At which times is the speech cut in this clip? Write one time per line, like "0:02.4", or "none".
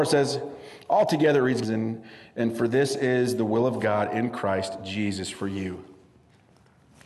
0:01.6